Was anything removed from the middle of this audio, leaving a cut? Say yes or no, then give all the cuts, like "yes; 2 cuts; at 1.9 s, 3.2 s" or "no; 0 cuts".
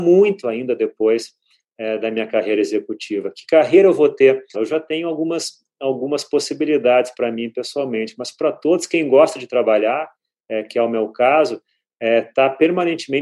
yes; 1 cut; at 4.5 s